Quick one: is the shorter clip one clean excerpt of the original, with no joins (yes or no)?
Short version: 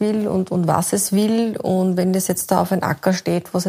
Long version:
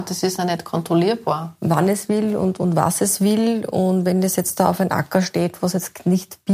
yes